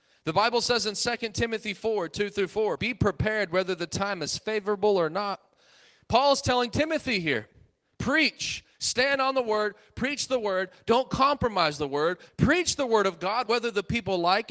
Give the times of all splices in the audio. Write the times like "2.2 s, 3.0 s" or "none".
2.8 s, 12.3 s, 13.5 s

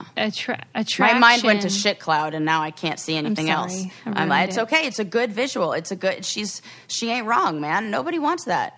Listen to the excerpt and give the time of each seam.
none

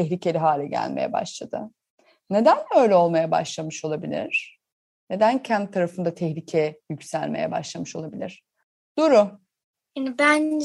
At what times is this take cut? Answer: none

